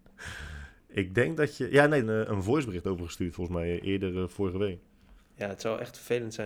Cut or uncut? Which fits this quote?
cut